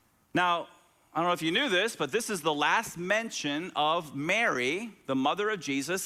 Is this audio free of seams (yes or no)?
yes